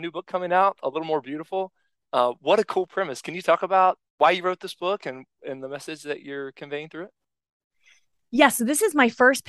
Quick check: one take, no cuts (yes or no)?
no